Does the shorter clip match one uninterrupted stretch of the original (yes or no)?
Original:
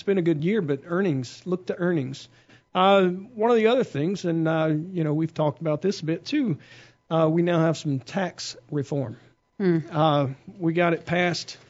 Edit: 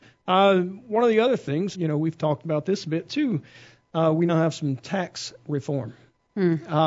no